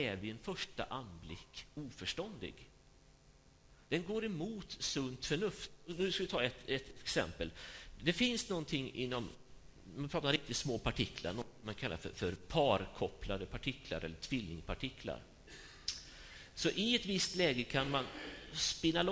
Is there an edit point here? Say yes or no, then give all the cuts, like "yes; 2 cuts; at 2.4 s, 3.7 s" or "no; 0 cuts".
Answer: yes; 1 cut; at 3.8 s